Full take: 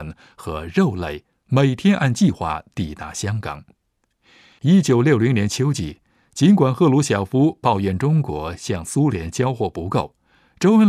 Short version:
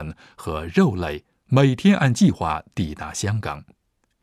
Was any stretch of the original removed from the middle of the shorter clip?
no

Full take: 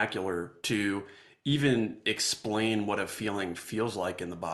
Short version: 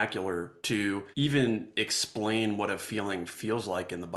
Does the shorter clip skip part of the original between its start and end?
yes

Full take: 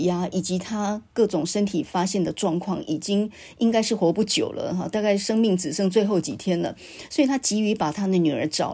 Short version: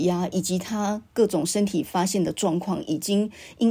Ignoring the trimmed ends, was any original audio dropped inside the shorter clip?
no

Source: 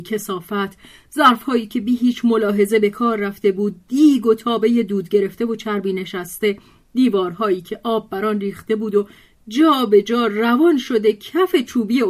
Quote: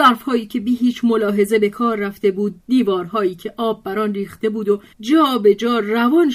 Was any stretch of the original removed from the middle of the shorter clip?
yes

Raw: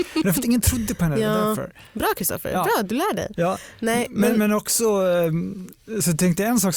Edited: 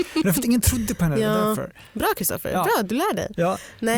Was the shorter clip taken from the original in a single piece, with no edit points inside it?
yes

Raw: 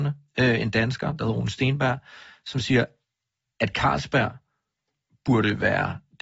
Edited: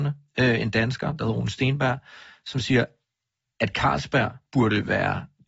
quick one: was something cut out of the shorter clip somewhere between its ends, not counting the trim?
yes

